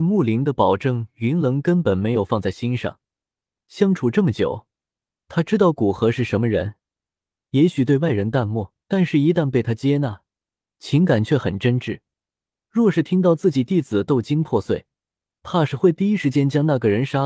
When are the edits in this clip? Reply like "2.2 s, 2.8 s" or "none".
8.8 s